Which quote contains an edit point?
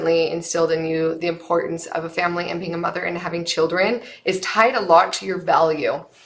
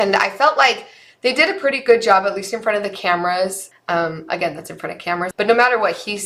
second; 2 cuts; at 3.7 s, 5.3 s

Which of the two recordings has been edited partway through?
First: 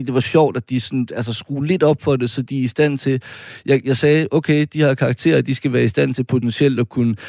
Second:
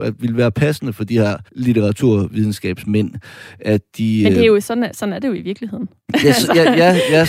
second; 1 cut; at 1.5 s

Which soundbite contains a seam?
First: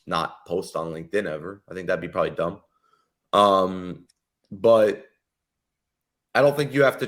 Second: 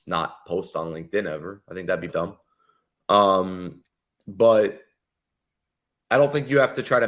second; 1 cut; at 2.1 s

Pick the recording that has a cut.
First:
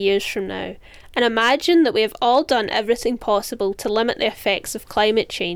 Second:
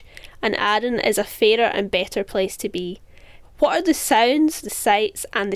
second; 2 cuts; at 3.4 s, 4.6 s

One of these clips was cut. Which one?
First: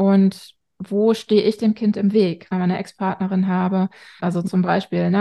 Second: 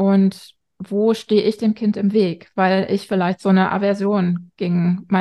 first; 2 cuts; at 2.5 s, 4.2 s

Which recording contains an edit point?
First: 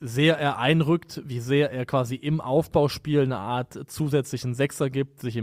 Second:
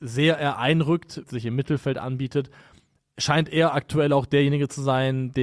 second; 1 cut; at 1.2 s

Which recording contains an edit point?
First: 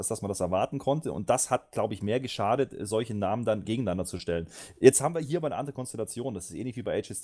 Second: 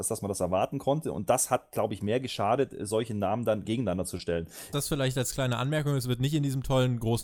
second; 1 cut; at 4.7 s

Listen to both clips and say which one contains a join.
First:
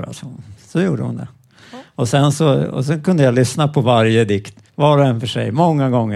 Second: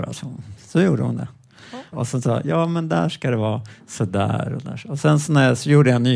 second; 1 cut; at 1.9 s

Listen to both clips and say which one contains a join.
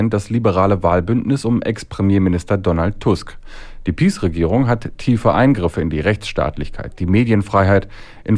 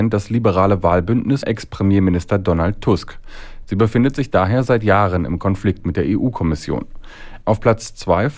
second; 3 cuts; at 1.4 s, 3.6 s, 7.4 s

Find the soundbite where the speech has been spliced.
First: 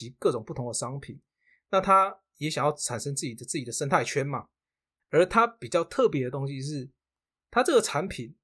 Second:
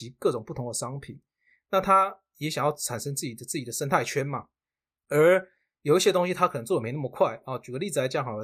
first; 1 cut; at 5.0 s

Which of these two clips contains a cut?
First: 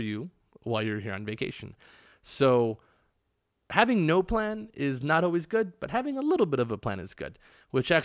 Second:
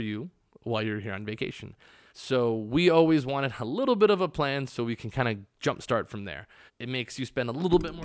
second; 2 cuts; at 2.1 s, 6.7 s

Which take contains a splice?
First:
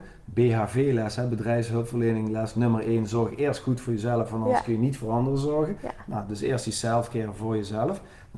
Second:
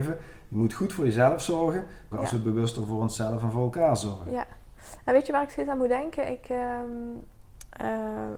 second; 1 cut; at 2.1 s

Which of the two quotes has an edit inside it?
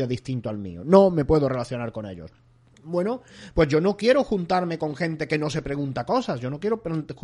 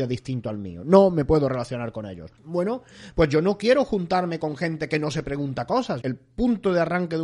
second; 2 cuts; at 2.4 s, 6.0 s

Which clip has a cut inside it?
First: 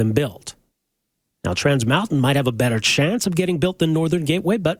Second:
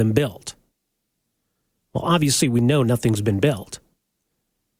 first; 1 cut; at 1.3 s

